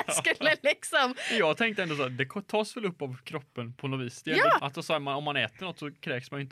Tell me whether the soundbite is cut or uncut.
cut